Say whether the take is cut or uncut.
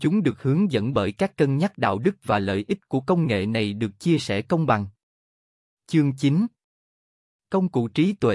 uncut